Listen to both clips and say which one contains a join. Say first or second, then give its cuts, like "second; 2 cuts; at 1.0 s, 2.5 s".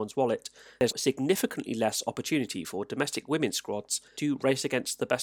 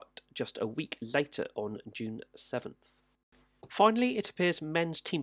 first; 1 cut; at 0.9 s